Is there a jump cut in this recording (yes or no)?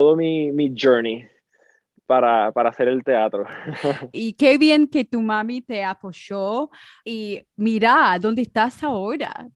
yes